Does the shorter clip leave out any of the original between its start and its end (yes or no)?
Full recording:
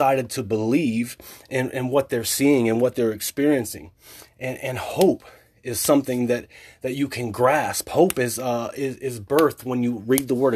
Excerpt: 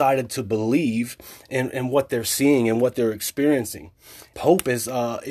yes